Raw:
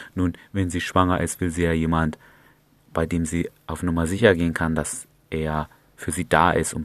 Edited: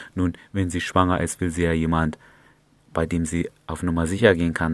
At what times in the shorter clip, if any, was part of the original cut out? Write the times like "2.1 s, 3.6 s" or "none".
none